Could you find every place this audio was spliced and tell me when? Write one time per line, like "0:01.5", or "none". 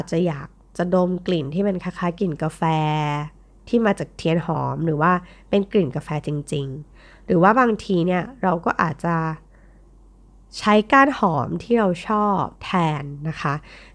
0:12.6